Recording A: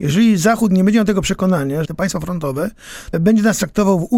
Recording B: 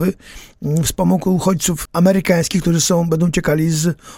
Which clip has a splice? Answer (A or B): A